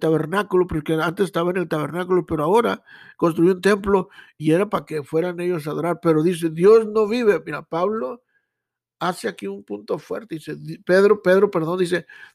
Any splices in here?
yes; 1 cut; at 4.4 s

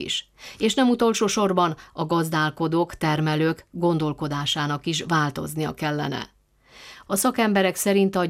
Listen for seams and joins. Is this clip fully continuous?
no; 1 cut; at 7.1 s

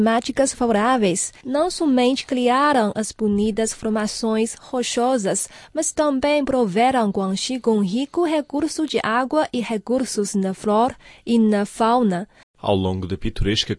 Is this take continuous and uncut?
no; 1 cut; at 12.4 s

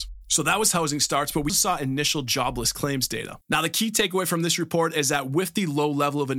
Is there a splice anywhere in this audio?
yes; 2 cuts; at 1.5 s, 3.4 s

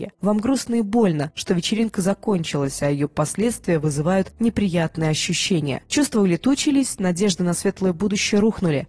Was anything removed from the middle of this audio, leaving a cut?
no; 0 cuts

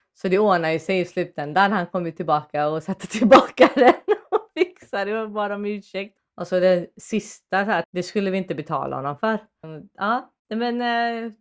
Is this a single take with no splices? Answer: no; 3 cuts; at 6.2 s, 7.8 s, 9.6 s

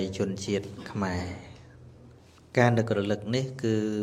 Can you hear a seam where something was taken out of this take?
no; 0 cuts

